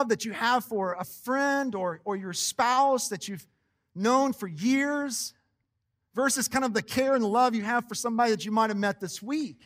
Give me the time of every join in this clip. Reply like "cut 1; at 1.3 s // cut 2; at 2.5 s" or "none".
none